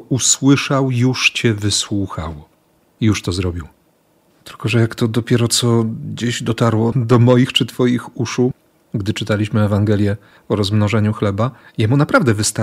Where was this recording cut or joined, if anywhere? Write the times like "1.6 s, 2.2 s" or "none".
4.3 s, 6.9 s